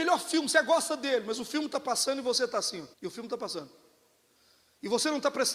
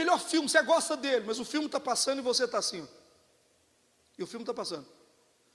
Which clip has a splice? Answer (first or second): first